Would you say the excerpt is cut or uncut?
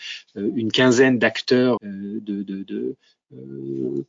cut